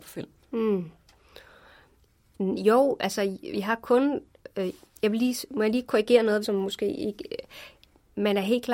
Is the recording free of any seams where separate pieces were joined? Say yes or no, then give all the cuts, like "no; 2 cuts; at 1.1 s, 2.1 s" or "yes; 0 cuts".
no; 2 cuts; at 2.3 s, 6.4 s